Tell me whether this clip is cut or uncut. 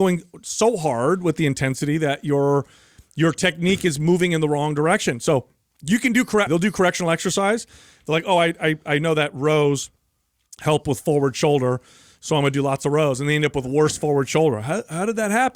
cut